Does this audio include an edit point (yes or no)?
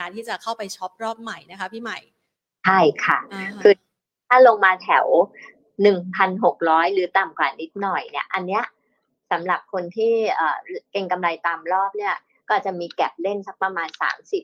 yes